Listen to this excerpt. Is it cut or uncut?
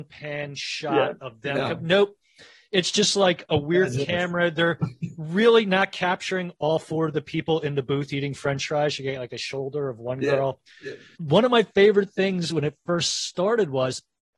uncut